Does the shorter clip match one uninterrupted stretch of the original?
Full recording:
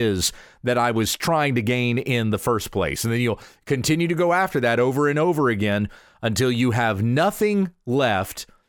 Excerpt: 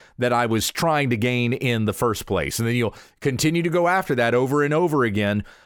yes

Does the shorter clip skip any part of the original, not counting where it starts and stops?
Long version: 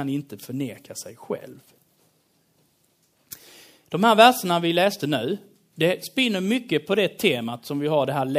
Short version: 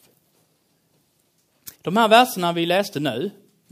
yes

